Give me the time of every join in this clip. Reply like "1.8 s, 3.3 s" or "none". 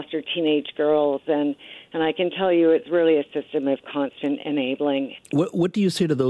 5.2 s